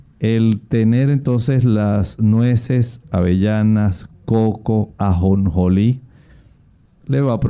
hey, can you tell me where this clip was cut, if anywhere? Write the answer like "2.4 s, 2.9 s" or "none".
3.0 s